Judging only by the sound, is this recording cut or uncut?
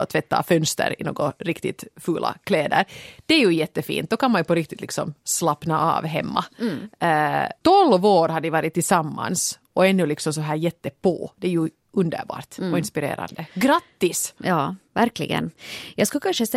uncut